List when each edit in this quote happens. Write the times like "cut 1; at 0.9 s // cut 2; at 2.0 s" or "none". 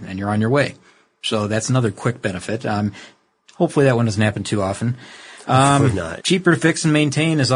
cut 1; at 6.2 s